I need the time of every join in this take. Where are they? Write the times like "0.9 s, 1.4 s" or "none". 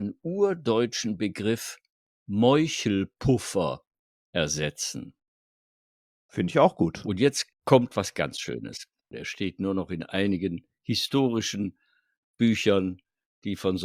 7.5 s, 9.1 s